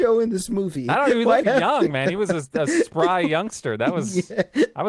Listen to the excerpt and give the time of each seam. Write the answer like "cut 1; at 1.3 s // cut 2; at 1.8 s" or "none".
cut 1; at 1.4 s